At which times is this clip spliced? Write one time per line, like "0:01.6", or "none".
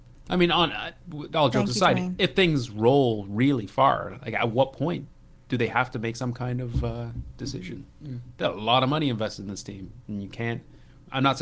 none